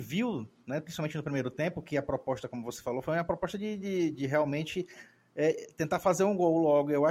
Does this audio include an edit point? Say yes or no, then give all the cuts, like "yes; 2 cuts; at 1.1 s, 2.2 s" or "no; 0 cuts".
no; 0 cuts